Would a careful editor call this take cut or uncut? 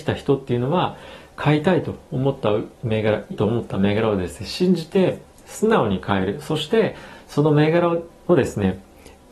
cut